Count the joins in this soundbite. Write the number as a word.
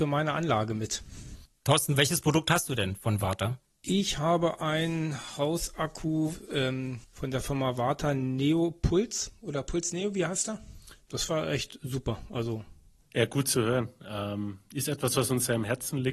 one